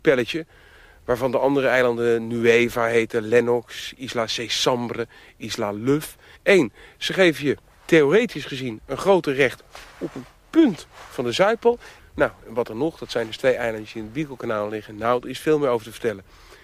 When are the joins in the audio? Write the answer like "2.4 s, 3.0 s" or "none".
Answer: 6.4 s, 12.0 s